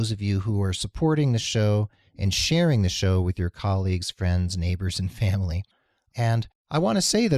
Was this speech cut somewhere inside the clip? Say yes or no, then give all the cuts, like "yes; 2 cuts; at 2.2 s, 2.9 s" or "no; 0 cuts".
no; 0 cuts